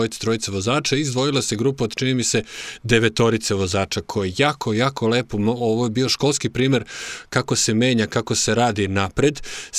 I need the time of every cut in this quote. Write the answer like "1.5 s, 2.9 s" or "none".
none